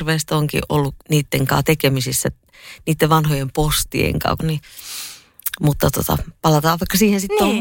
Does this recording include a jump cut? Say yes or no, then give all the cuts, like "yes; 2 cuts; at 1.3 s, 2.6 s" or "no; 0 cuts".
yes; 2 cuts; at 1.0 s, 4.4 s